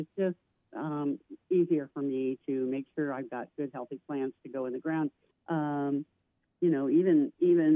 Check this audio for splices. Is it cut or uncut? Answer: cut